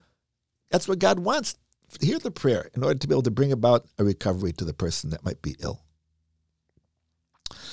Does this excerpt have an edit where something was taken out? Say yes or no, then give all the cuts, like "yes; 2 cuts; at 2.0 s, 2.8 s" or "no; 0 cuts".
no; 0 cuts